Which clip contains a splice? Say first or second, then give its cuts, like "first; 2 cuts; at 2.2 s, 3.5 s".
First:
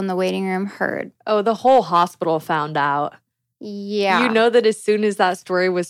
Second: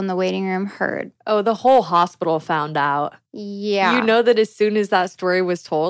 second; 1 cut; at 3.3 s